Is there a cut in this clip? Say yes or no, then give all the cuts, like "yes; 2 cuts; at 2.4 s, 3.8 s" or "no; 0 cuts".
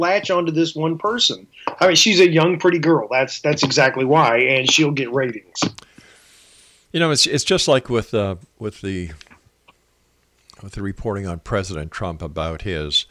no; 0 cuts